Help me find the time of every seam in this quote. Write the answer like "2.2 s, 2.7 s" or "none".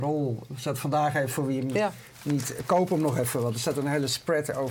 none